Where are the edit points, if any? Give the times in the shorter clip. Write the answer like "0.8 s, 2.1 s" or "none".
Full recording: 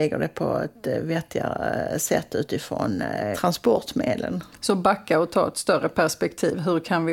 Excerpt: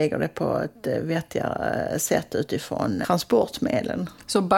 3.0 s